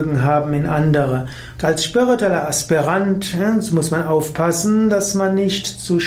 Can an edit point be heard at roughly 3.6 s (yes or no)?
no